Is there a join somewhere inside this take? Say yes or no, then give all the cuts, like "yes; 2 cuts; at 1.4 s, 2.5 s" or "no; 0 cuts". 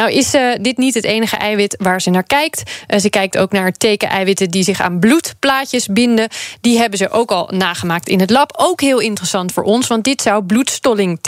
no; 0 cuts